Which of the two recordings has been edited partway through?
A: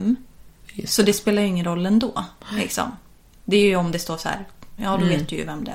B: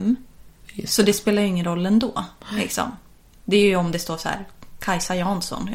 A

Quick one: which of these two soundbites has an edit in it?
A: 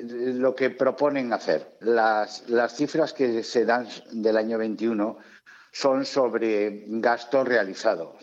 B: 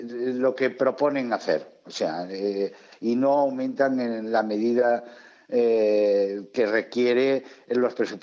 A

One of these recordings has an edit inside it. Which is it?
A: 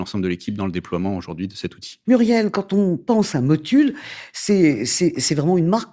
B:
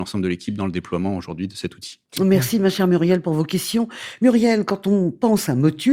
A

